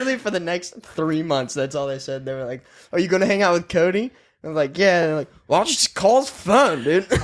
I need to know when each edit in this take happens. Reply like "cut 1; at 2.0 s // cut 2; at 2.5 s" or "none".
none